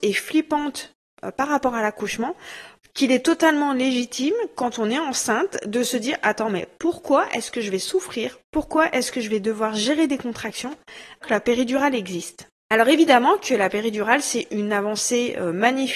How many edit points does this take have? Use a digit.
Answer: 2